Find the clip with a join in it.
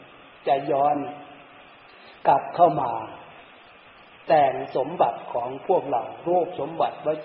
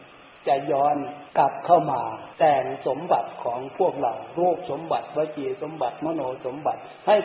second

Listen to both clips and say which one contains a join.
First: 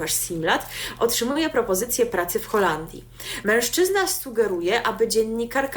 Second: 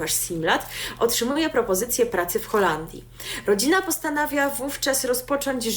first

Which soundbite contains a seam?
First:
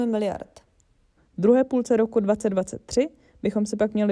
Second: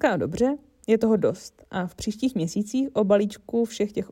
first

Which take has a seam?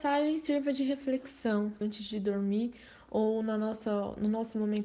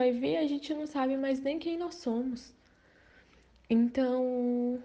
first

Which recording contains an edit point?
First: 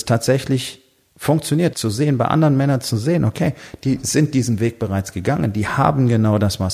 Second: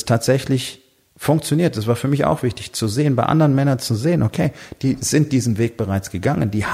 first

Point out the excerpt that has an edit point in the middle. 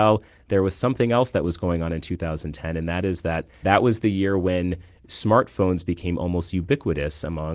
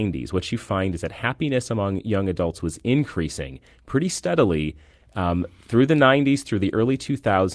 first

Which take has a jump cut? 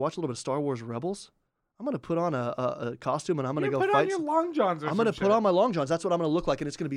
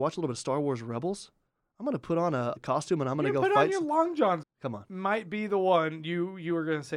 second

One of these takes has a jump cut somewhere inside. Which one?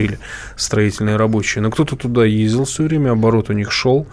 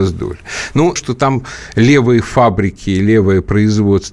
second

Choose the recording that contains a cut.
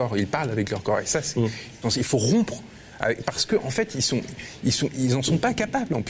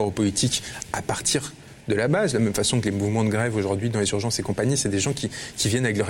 first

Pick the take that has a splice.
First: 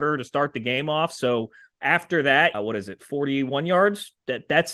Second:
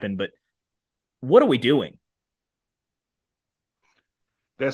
first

